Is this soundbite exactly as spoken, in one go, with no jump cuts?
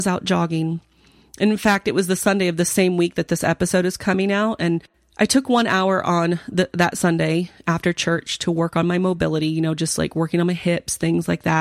yes; 0 cuts

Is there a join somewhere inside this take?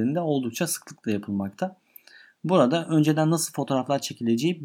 no; 0 cuts

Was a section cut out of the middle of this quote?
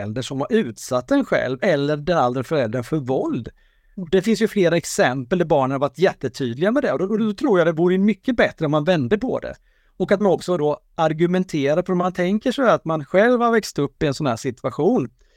no; 0 cuts

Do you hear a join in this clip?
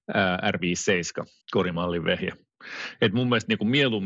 yes; 1 cut; at 1.4 s

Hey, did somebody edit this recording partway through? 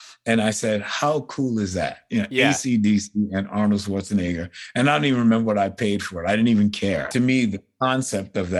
yes; 1 cut; at 7.1 s

